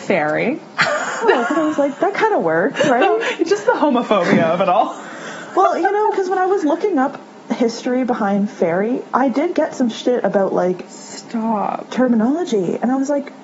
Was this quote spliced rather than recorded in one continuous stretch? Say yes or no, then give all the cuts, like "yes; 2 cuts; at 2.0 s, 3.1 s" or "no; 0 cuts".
yes; 1 cut; at 1.2 s